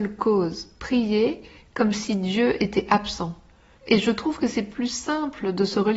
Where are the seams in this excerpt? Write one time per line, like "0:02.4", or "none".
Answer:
0:03.8